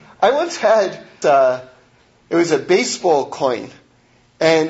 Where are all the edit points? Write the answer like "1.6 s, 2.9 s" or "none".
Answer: 1.2 s